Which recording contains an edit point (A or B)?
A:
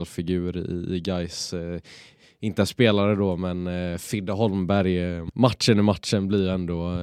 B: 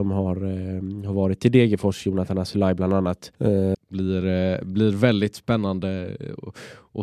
B